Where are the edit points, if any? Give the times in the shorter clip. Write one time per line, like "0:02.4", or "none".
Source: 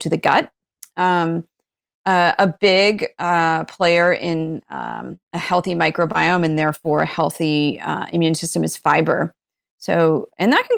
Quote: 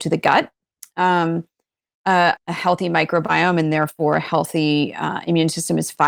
0:02.4